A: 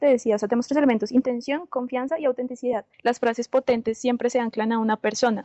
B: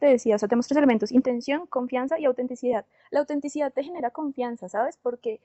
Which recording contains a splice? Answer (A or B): A